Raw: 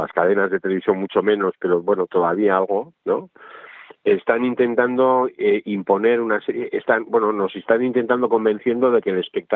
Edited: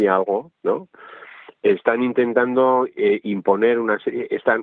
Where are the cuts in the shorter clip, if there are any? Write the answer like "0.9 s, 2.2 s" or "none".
none